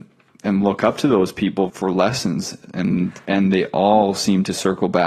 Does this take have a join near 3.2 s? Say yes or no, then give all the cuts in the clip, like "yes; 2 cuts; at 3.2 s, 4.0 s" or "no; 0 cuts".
no; 1 cut; at 1.7 s